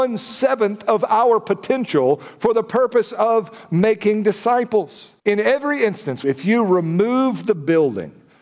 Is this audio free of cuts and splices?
no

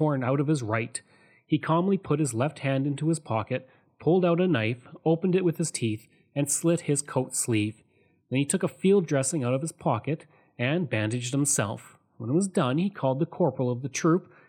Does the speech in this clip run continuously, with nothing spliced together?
yes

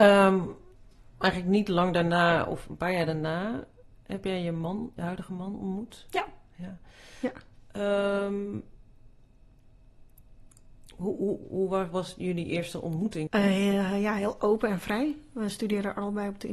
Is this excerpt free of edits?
no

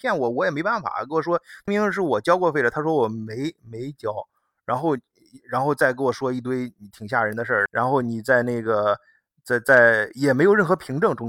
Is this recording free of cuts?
no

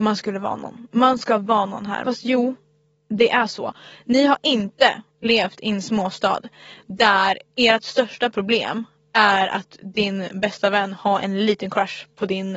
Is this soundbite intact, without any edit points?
no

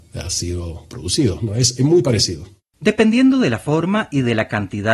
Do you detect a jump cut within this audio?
no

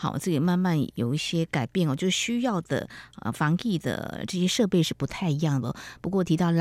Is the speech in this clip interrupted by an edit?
no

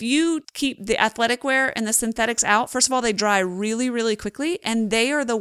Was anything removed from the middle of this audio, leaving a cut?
no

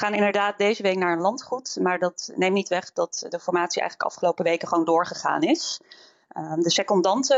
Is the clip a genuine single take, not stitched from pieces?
yes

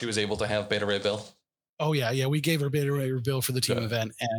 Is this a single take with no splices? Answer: yes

